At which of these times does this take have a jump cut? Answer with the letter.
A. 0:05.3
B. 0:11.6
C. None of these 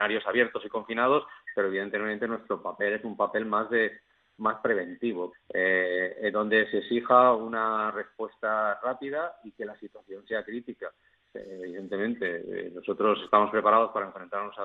A